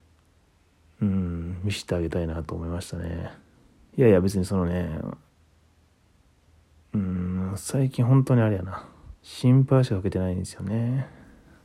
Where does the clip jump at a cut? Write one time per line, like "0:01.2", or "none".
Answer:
0:03.9
0:09.2